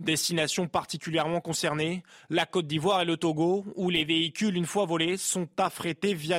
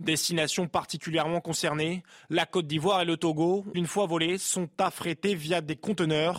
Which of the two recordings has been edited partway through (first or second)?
second